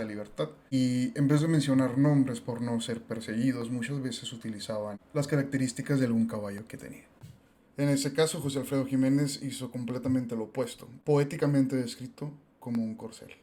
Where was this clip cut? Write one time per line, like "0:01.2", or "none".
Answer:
0:11.0